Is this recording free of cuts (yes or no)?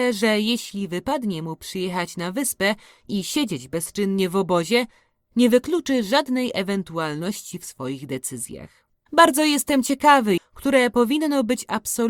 no